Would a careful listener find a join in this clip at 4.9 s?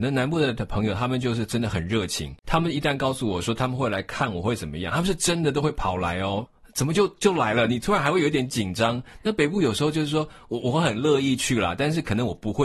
no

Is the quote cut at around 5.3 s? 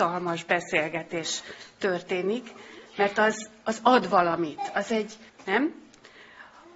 yes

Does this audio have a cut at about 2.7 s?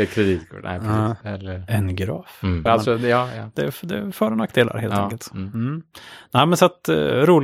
yes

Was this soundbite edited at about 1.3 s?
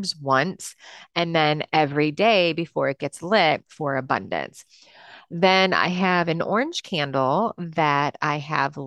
no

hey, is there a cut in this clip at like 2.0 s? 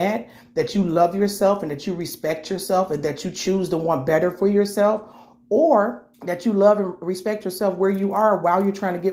no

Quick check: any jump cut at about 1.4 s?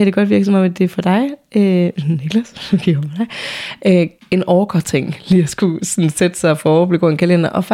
no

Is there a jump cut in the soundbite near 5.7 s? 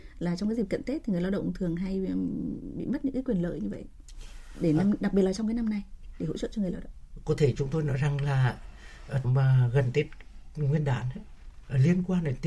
no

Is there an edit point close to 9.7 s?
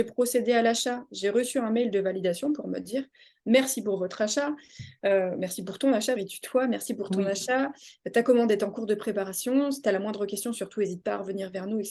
no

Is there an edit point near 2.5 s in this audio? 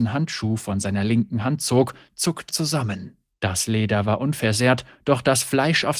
yes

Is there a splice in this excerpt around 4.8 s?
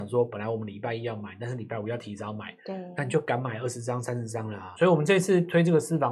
yes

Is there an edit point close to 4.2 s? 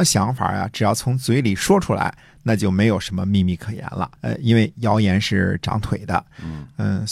yes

